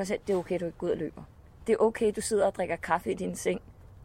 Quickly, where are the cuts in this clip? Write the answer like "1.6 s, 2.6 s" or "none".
none